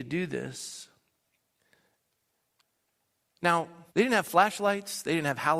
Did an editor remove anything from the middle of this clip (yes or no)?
yes